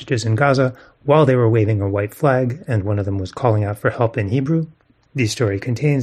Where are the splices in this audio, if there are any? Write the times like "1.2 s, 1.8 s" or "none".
none